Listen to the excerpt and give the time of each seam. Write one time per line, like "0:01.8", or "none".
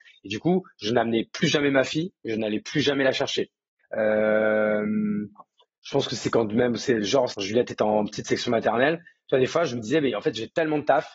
0:03.8
0:07.3